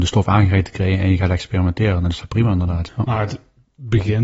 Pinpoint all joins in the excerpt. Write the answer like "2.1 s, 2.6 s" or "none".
2.9 s